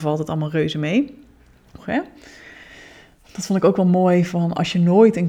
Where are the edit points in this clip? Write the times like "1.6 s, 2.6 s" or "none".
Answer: 1.8 s